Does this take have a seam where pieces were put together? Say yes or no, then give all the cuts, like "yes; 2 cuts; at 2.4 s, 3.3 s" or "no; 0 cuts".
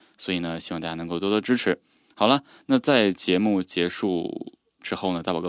no; 0 cuts